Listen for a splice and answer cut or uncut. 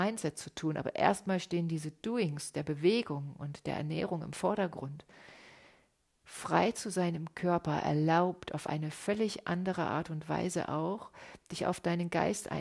uncut